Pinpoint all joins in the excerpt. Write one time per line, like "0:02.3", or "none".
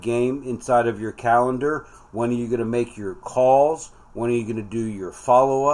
0:02.1